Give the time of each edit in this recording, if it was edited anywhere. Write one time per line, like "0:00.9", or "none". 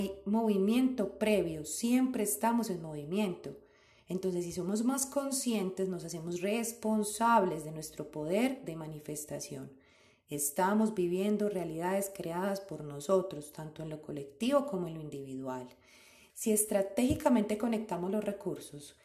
0:16.3